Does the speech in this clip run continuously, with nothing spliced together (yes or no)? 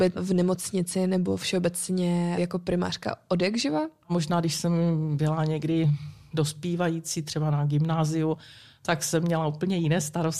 yes